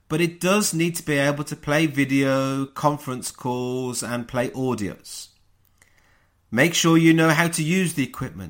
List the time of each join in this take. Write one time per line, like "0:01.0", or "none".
none